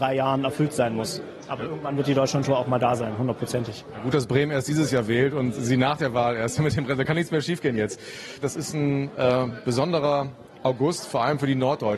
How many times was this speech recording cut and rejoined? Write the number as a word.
two